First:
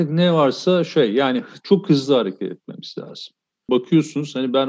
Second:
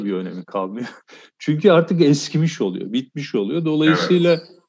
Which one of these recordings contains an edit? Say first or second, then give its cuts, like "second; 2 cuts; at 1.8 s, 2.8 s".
first; 1 cut; at 3.7 s